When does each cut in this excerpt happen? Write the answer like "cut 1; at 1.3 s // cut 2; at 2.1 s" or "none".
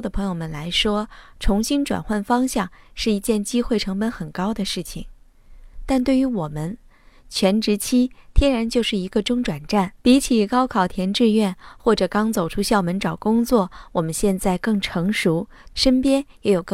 cut 1; at 10.0 s // cut 2; at 15.7 s

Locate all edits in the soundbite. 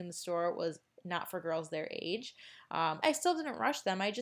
cut 1; at 3.0 s

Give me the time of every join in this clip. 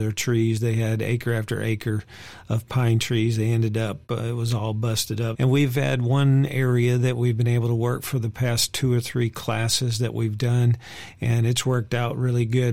cut 1; at 5.3 s

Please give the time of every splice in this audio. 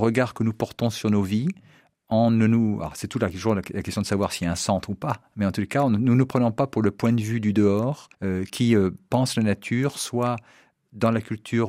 cut 1; at 8.1 s

